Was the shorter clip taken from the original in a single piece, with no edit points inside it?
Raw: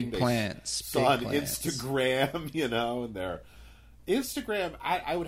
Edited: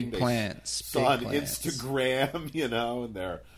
yes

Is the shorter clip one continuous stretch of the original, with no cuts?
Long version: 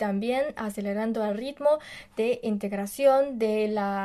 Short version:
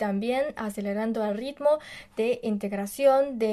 yes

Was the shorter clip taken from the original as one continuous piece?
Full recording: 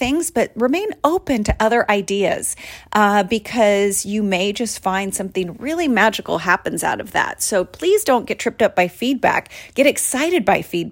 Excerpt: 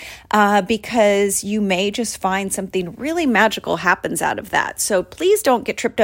yes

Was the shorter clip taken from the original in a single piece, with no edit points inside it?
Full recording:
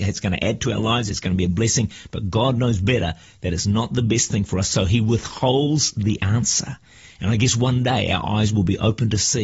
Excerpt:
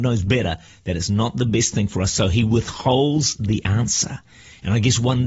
yes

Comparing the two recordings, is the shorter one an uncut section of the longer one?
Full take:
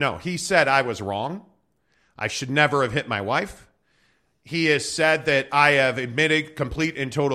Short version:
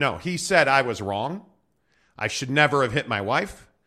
yes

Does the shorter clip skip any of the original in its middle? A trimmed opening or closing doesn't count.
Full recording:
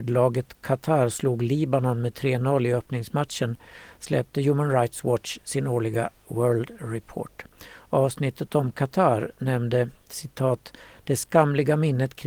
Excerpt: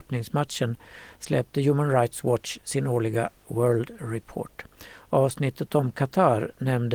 no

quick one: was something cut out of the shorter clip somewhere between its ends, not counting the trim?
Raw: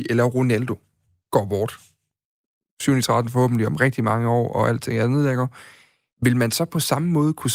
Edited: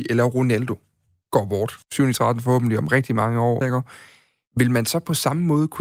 yes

